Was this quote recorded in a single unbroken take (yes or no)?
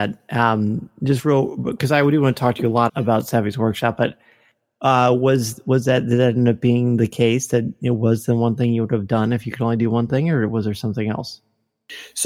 no